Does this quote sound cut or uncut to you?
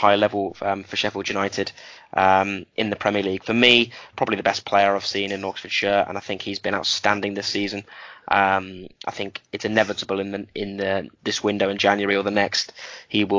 cut